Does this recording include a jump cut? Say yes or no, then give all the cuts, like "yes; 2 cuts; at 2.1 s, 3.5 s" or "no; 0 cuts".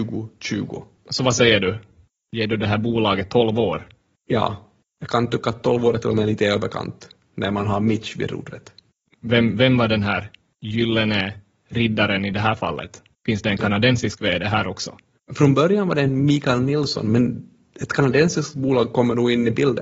no; 0 cuts